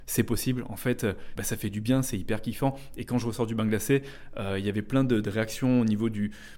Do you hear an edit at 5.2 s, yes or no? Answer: no